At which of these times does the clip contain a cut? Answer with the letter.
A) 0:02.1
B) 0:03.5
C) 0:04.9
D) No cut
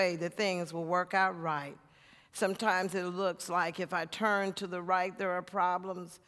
D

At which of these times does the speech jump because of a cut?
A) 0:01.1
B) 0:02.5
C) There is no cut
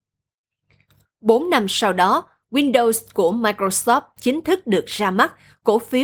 C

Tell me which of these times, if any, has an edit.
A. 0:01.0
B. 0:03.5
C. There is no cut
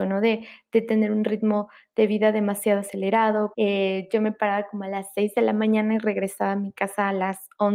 B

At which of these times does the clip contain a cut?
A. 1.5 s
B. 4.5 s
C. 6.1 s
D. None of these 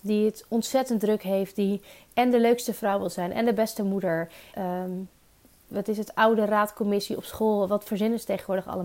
B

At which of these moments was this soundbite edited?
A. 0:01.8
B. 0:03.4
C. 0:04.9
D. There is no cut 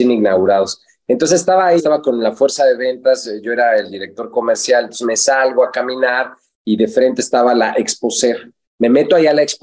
A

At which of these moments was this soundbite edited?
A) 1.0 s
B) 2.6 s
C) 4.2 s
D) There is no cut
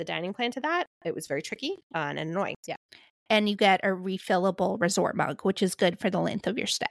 B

